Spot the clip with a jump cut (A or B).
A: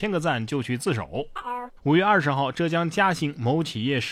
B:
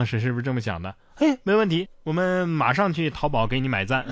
A